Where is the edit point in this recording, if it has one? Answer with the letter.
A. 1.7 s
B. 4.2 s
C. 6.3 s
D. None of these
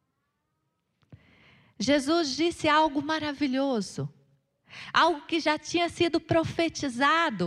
D